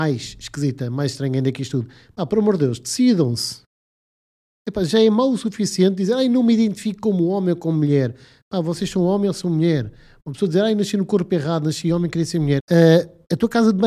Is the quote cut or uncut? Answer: cut